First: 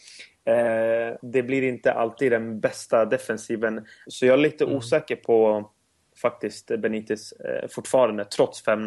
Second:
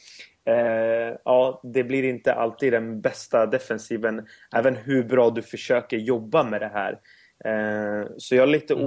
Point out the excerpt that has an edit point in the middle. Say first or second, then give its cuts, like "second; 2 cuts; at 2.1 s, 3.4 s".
first; 2 cuts; at 1.2 s, 4.1 s